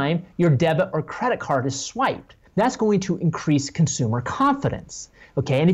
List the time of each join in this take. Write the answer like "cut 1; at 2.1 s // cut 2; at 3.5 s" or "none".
cut 1; at 2.5 s